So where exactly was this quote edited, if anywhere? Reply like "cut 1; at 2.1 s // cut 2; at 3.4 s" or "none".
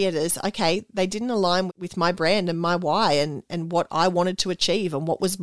cut 1; at 1.7 s

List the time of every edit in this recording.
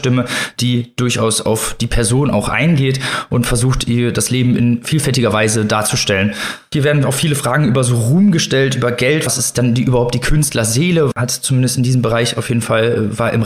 cut 1; at 9.3 s // cut 2; at 11.1 s

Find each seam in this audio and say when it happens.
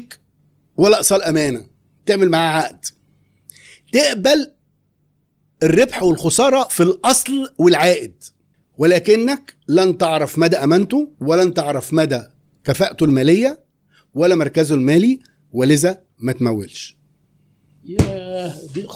cut 1; at 9.6 s // cut 2; at 11.1 s

